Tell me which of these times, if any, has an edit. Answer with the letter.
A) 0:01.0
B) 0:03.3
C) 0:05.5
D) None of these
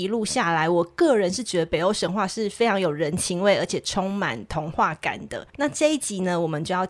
C